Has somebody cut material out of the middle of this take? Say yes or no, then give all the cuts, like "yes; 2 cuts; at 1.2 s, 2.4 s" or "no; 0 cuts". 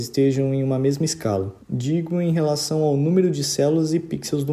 yes; 1 cut; at 1.6 s